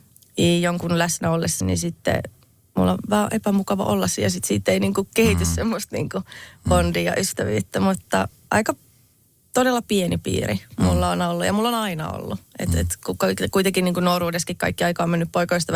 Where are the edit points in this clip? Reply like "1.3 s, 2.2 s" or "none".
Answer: 1.6 s